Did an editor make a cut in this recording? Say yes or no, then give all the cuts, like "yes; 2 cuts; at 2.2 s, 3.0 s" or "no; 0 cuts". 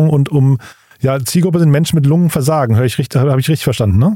no; 0 cuts